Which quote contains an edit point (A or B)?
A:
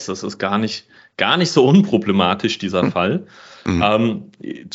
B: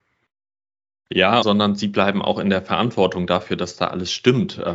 B